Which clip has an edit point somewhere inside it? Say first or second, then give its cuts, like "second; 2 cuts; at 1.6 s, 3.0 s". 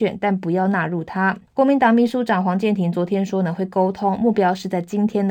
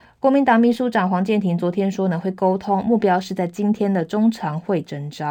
first; 1 cut; at 1.5 s